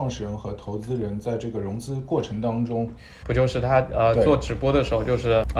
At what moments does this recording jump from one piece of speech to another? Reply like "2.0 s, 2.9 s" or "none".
3.2 s